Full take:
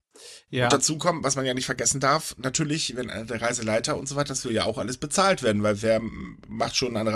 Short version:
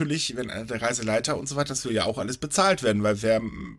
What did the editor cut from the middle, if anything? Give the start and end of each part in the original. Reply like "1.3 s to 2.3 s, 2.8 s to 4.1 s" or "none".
none